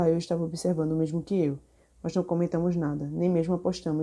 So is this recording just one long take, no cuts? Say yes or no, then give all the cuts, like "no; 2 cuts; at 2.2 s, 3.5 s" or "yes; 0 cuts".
yes; 0 cuts